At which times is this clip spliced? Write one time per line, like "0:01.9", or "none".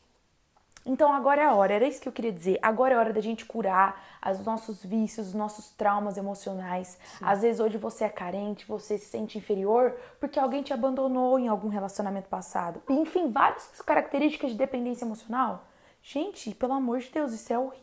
0:12.9